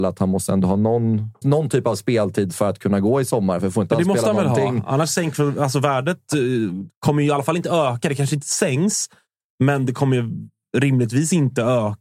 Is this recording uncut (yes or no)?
no